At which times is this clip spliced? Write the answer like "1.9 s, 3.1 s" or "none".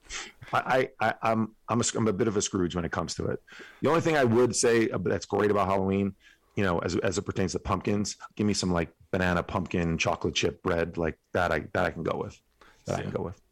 8.3 s